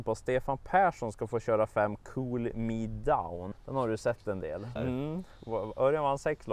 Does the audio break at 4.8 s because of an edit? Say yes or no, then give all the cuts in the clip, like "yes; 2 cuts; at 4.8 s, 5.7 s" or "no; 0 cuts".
yes; 2 cuts; at 3.5 s, 4.8 s